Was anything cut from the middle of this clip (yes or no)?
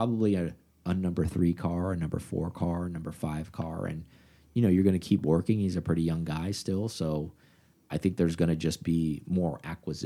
no